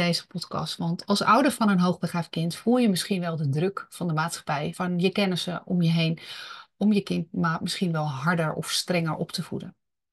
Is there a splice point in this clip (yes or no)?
yes